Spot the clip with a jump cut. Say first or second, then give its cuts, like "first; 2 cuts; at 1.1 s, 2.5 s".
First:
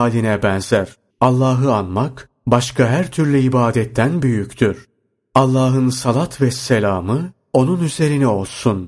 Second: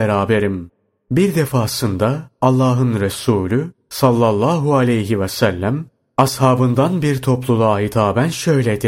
first; 1 cut; at 1.1 s